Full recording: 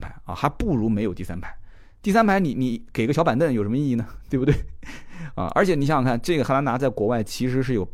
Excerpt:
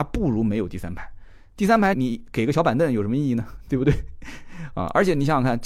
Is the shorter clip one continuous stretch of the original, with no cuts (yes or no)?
no